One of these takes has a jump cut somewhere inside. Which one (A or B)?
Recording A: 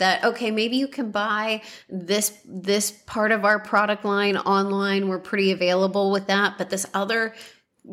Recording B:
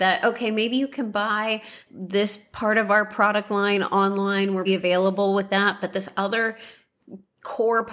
B